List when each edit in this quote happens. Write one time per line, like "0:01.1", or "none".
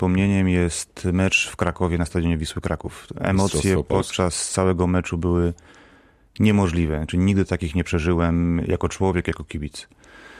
none